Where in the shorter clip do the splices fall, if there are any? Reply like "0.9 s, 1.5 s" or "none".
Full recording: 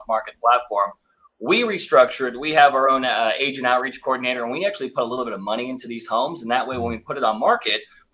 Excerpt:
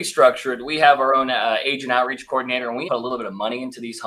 2.9 s